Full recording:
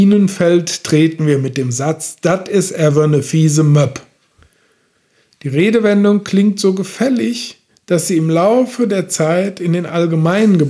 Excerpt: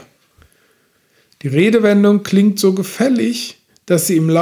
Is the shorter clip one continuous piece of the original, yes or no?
yes